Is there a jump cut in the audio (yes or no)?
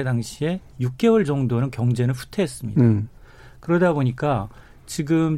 no